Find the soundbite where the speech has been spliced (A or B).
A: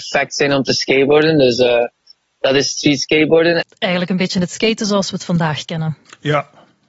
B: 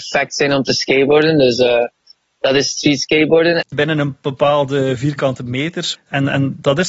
B